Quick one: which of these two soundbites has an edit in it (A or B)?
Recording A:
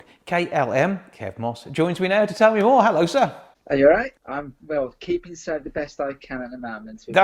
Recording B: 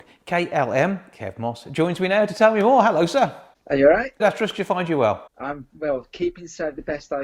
A